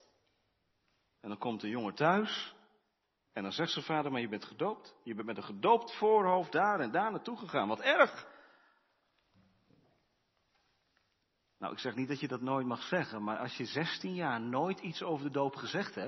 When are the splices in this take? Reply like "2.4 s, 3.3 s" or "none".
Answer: none

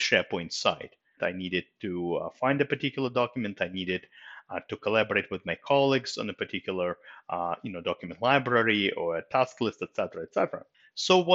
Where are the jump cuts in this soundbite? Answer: 1.2 s

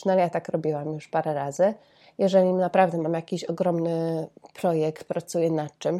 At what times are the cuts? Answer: none

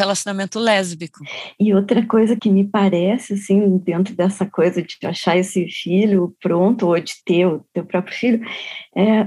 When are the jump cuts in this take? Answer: 2.4 s

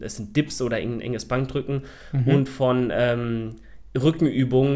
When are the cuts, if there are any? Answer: none

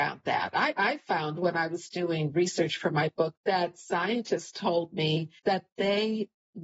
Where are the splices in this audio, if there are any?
3.3 s, 5.4 s

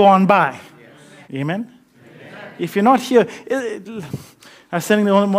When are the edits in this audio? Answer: 1.2 s

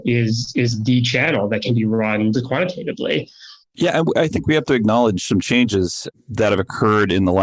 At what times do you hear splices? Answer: 2.3 s, 3.6 s

